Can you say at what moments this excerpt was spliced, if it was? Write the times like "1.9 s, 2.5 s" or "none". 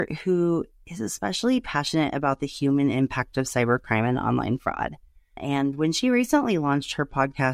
5.4 s